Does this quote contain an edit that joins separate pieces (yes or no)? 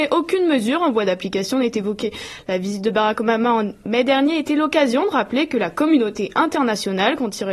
no